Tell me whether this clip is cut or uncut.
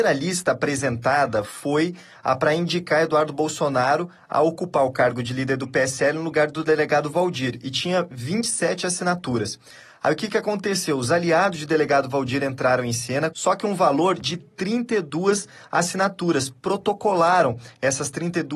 cut